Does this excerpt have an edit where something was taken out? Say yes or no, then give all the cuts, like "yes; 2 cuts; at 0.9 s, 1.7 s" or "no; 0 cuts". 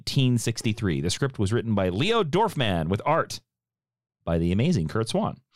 no; 0 cuts